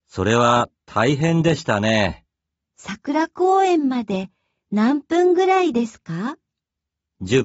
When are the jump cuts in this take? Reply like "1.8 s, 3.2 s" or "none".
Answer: 2.6 s